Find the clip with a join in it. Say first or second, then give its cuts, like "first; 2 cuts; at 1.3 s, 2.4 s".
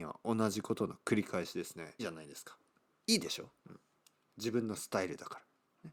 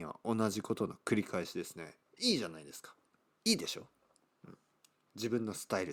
first; 2 cuts; at 2.0 s, 3.6 s